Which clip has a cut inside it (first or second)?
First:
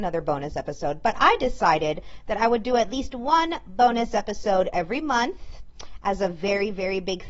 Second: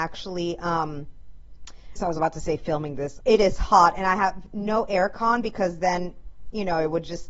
second